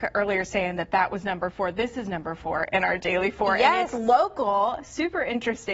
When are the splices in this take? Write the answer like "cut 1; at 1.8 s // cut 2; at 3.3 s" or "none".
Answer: none